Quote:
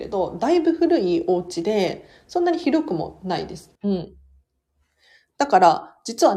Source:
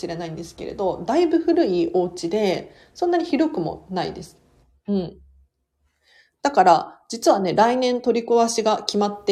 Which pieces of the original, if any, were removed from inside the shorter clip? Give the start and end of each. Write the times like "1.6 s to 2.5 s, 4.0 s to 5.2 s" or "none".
4.4 s to 4.8 s